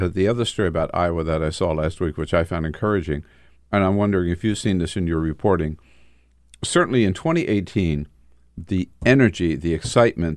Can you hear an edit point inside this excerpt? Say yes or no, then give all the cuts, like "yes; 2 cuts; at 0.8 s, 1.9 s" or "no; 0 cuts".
no; 0 cuts